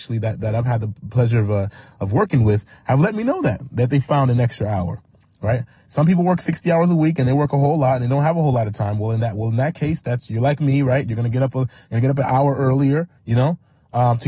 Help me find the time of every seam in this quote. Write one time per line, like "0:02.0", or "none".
0:13.2